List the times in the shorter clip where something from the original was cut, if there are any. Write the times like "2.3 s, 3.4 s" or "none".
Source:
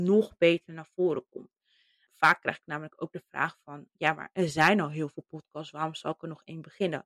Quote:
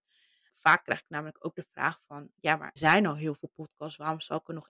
2.8 s